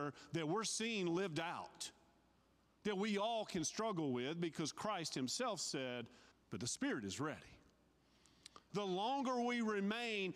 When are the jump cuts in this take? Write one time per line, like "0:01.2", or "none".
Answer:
0:06.3
0:08.7